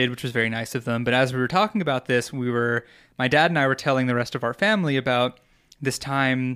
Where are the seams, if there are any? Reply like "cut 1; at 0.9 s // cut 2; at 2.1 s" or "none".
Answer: none